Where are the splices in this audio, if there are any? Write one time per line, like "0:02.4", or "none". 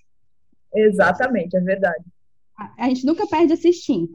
none